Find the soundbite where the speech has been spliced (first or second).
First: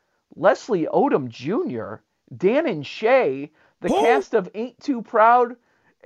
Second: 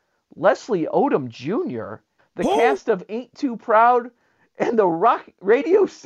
second